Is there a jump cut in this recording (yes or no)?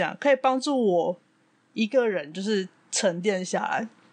no